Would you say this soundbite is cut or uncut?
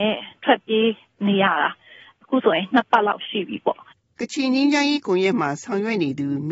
uncut